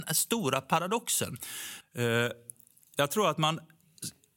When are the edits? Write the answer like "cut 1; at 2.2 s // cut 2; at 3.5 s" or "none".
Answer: cut 1; at 1.8 s